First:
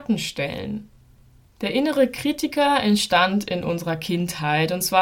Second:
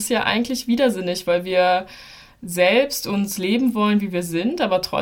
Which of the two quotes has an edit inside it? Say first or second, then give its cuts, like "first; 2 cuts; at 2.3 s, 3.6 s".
first; 1 cut; at 1.4 s